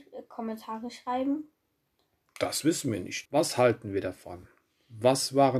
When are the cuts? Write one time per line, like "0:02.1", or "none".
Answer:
0:03.3